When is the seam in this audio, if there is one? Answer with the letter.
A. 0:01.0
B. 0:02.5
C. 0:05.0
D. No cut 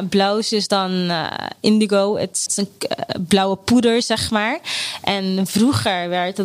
B